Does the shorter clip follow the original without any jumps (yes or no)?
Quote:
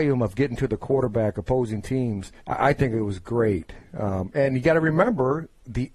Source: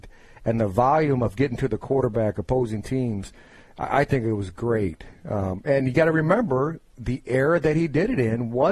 no